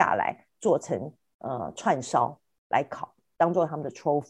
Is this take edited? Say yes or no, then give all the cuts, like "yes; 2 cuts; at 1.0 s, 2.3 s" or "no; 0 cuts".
no; 0 cuts